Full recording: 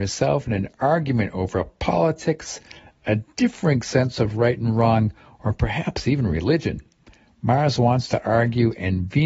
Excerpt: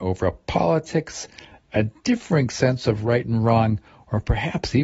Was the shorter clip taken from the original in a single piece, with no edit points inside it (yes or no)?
yes